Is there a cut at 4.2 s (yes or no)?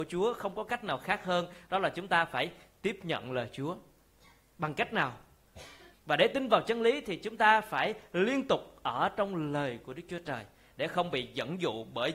no